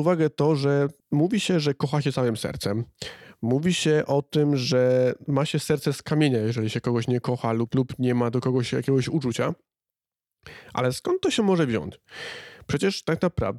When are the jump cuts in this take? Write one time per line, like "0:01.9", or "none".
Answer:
0:01.0